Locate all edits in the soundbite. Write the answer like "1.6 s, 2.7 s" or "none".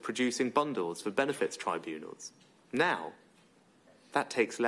2.6 s